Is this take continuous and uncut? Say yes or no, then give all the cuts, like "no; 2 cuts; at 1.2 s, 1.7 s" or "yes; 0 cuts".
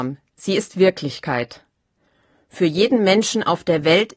yes; 0 cuts